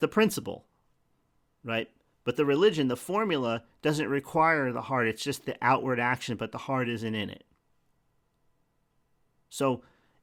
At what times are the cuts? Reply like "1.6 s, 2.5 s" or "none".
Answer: none